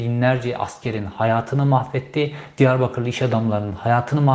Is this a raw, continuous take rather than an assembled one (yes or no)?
yes